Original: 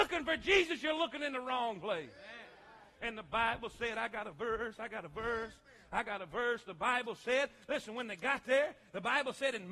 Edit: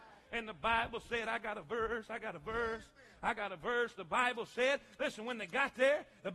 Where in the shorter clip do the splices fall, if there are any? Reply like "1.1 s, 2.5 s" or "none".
none